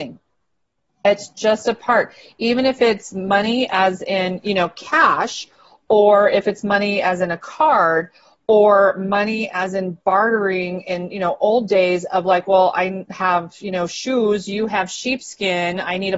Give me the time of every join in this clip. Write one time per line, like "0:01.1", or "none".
none

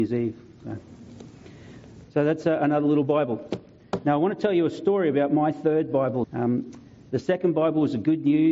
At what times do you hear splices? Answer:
0:06.2

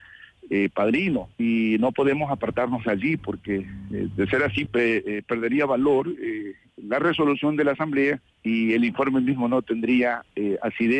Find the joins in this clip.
0:01.3
0:04.7
0:08.3

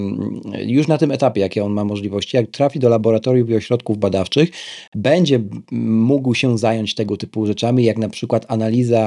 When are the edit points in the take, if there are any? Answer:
none

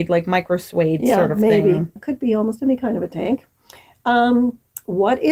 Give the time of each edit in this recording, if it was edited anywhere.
0:02.0

